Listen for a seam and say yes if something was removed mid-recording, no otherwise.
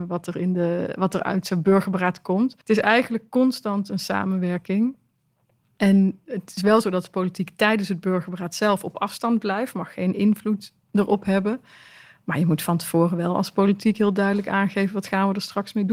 yes